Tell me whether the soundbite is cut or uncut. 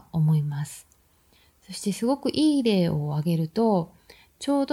uncut